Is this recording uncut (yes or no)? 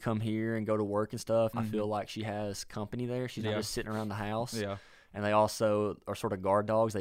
no